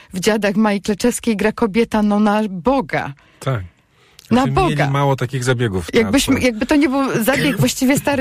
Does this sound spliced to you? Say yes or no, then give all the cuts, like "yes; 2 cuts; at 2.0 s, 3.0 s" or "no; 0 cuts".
no; 0 cuts